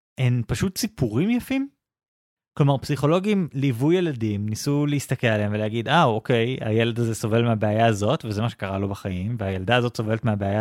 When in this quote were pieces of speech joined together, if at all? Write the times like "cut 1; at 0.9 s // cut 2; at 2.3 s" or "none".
none